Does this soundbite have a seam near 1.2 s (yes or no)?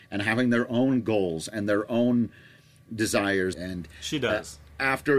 no